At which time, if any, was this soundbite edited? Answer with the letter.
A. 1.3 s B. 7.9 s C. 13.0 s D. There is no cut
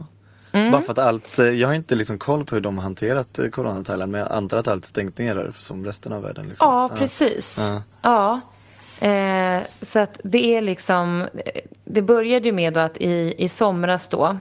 D